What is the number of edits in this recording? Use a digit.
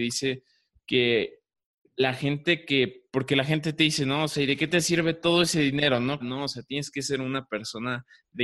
1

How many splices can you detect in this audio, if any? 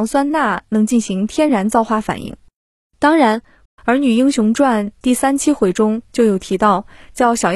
1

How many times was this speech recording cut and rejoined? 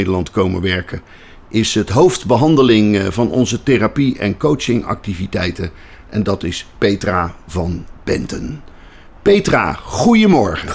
0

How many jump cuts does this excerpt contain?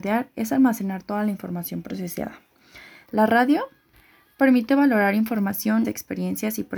2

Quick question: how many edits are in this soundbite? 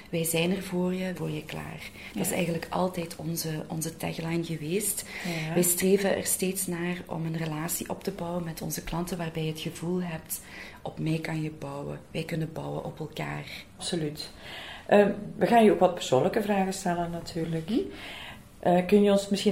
2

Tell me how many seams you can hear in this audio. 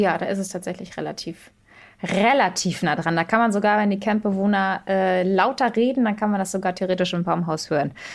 0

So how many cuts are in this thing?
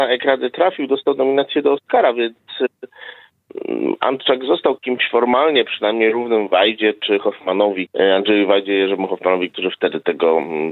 0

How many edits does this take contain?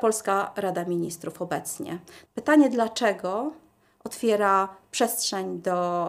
1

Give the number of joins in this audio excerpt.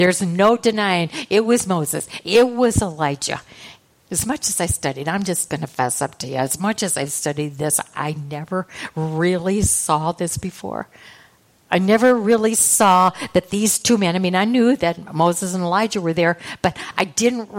1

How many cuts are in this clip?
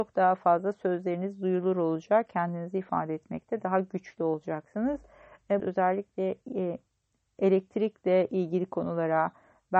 1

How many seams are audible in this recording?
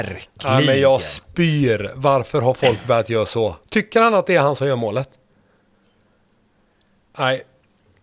1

